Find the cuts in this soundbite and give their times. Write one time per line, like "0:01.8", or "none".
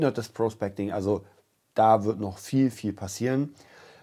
0:02.7